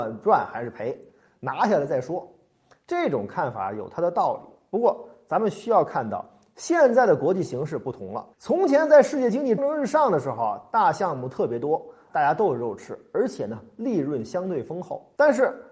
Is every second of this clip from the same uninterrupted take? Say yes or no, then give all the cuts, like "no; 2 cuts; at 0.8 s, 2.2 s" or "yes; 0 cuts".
no; 3 cuts; at 8.3 s, 9.6 s, 12.1 s